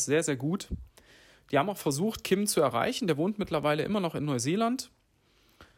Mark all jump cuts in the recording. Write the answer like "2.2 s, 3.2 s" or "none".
none